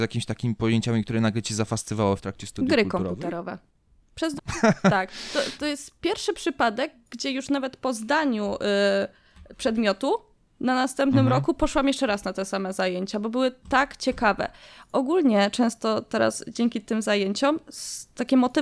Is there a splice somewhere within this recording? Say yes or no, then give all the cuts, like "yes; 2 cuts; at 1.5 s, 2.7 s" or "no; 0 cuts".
yes; 1 cut; at 4.4 s